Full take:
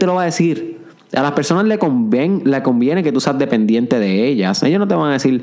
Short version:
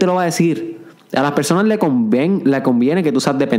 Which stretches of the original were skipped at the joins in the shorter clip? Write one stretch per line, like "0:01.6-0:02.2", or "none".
none